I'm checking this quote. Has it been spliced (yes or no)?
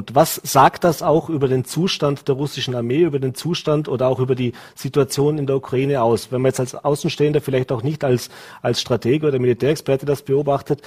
no